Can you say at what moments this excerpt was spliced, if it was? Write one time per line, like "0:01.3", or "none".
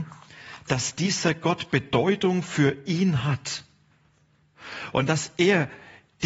none